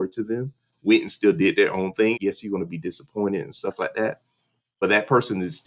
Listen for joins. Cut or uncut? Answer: cut